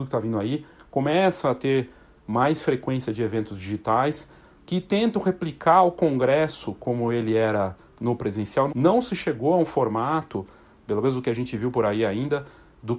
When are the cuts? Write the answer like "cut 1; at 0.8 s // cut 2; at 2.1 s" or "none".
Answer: cut 1; at 8.7 s